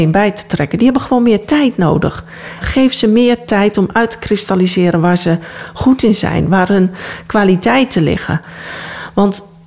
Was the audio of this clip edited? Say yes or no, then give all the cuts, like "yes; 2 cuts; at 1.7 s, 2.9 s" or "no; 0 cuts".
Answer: yes; 1 cut; at 2.6 s